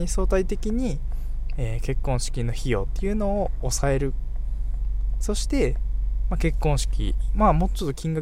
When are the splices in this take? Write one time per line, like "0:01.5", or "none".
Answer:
none